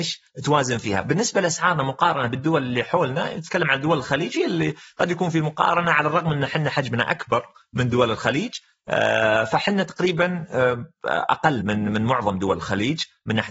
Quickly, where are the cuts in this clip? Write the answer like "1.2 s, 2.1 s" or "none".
11.6 s

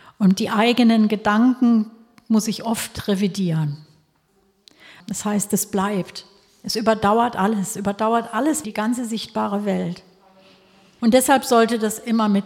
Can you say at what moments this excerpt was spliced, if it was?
5.0 s, 8.6 s, 11.0 s

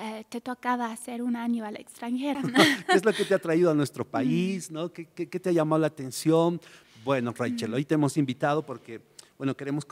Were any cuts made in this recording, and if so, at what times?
2.3 s, 6.8 s

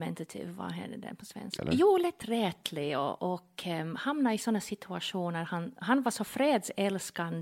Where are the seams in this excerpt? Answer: 1.6 s

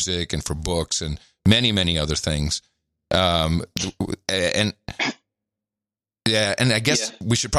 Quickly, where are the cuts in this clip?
none

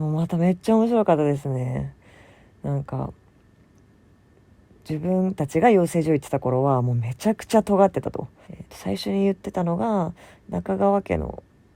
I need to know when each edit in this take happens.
8.4 s

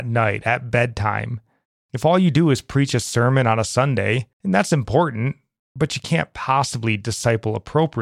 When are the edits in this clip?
1.8 s, 4.3 s

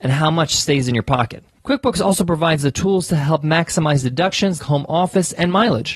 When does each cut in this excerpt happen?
4.6 s

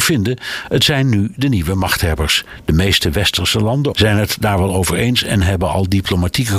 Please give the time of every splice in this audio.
3.9 s

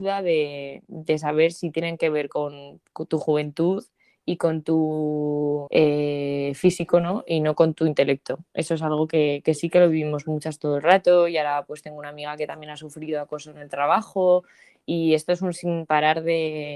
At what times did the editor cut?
5.7 s

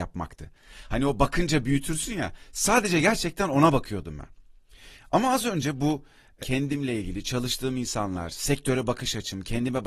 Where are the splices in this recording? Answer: 6.4 s

